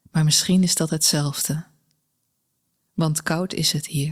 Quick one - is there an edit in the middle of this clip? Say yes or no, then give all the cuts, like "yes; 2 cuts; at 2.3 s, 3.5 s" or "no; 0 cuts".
no; 0 cuts